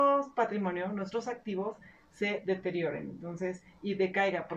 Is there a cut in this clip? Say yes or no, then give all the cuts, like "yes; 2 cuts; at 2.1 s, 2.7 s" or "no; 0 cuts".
no; 0 cuts